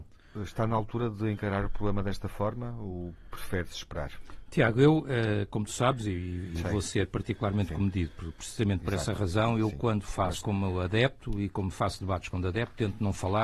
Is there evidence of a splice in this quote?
yes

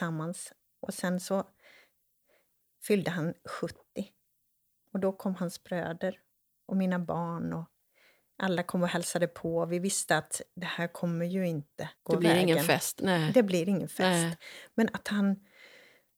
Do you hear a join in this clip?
yes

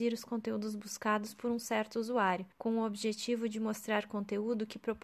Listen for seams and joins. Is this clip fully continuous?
no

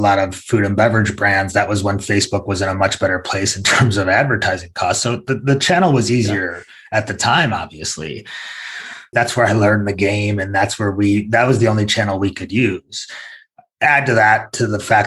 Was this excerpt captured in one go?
no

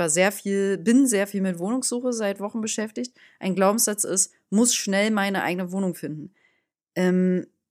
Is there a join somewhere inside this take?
no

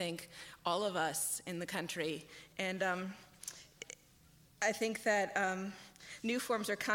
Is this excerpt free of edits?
yes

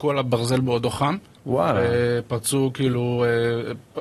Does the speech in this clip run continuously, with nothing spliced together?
yes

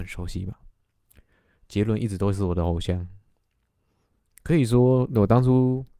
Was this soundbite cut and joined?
no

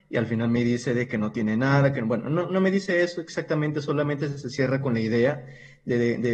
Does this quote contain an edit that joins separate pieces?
no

